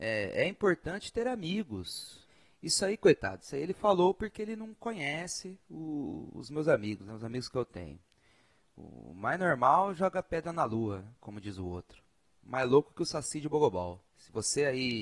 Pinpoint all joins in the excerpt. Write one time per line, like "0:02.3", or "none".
0:14.1